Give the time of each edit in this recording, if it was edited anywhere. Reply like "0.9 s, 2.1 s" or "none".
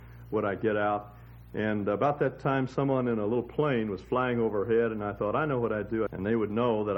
6.1 s